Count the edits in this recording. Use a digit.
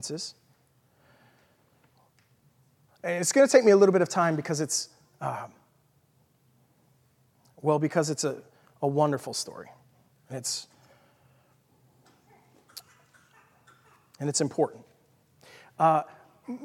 1